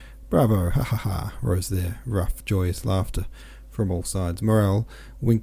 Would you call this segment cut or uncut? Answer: uncut